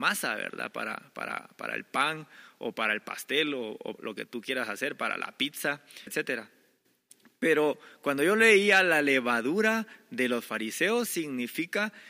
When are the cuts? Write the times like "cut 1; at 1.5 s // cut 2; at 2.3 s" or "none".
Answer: cut 1; at 3.9 s // cut 2; at 6.1 s // cut 3; at 11.1 s